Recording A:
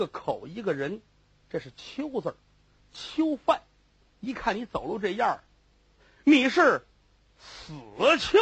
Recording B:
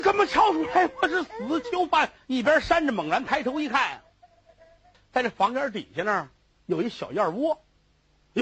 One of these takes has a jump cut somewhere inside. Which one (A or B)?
B